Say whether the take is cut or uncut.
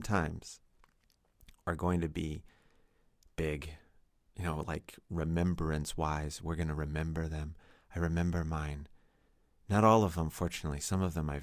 uncut